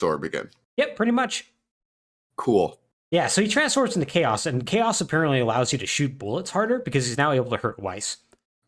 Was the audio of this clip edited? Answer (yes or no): no